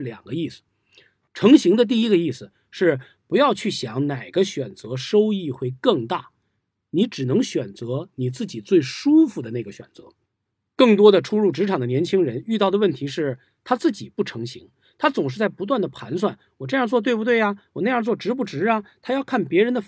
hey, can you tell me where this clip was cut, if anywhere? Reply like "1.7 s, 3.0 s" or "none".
none